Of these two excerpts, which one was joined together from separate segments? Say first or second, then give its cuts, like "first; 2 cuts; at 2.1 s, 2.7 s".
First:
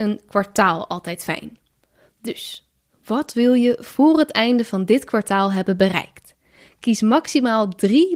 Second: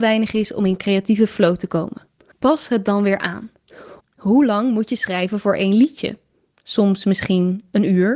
second; 1 cut; at 4.0 s